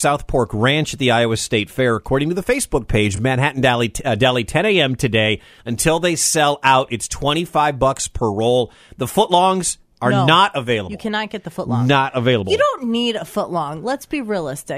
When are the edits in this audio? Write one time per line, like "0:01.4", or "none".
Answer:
none